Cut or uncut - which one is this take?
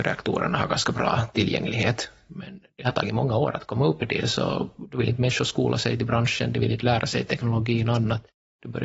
cut